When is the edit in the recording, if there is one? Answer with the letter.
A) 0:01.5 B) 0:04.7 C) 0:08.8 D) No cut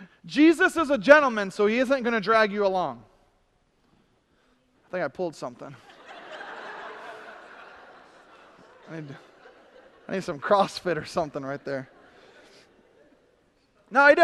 B